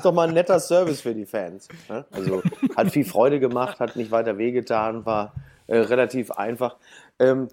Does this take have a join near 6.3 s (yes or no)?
no